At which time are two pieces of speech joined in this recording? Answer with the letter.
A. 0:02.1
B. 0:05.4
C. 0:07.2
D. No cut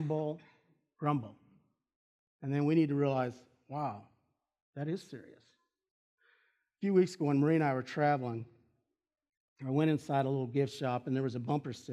D